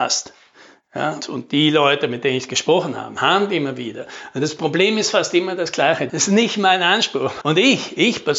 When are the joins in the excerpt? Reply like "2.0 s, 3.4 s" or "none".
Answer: 1.2 s, 6.1 s, 7.4 s

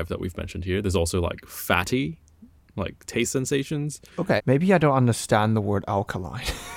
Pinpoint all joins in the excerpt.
4.4 s

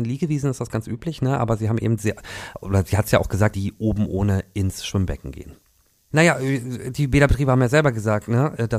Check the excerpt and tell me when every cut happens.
3.5 s, 6.1 s

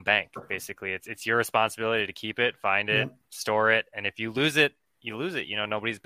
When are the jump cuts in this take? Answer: none

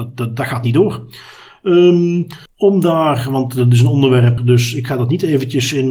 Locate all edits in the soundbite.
2.5 s, 4.4 s

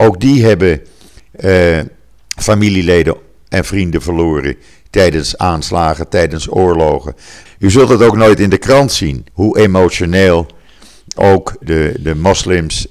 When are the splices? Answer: 7.5 s, 9.3 s, 11.6 s

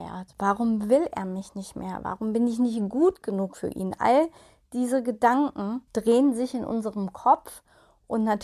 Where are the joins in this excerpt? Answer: none

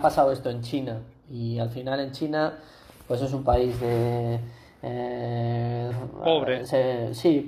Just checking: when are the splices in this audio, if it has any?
5.9 s

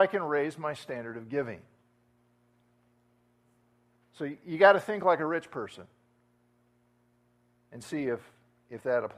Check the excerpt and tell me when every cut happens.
none

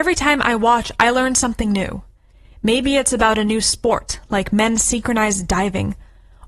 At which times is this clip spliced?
none

